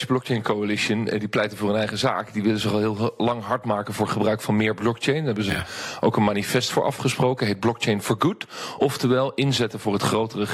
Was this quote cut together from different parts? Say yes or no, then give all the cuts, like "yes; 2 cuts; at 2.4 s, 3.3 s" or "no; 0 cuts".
no; 0 cuts